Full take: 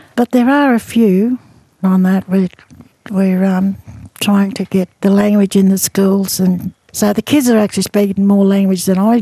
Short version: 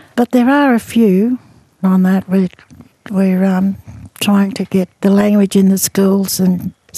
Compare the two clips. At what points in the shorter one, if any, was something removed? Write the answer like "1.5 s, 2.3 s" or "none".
none